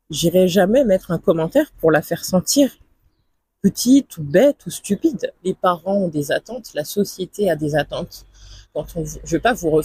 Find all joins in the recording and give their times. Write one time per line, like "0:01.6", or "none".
0:05.3
0:08.6

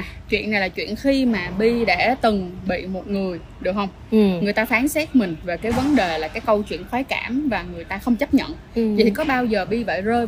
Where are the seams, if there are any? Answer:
none

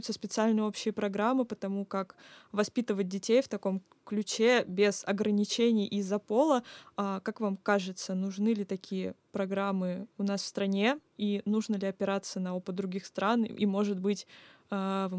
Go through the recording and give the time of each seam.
none

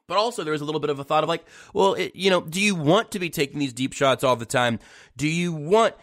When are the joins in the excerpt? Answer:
none

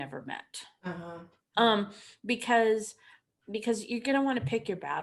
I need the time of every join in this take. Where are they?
0:01.5

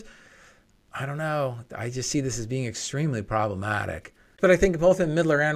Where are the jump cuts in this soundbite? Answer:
0:04.4

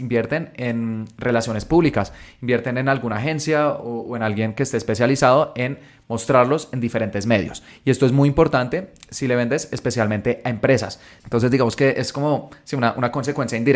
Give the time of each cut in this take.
0:11.2

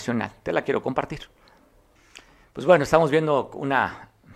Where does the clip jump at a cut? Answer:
none

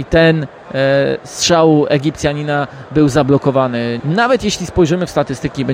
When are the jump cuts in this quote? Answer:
0:04.0

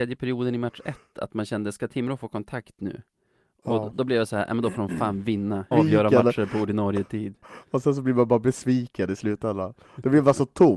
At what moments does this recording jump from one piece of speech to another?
0:05.7

